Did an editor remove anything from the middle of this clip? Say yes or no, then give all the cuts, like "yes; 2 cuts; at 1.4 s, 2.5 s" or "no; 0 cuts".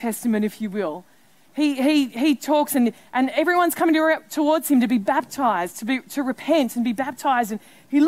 no; 0 cuts